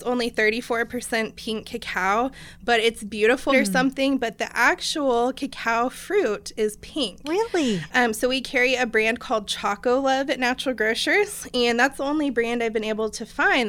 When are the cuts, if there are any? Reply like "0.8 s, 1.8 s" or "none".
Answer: 3.5 s, 7.9 s